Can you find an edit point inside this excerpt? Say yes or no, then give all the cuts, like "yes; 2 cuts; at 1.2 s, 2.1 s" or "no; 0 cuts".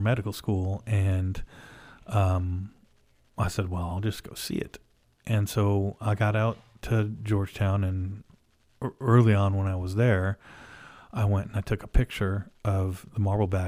no; 0 cuts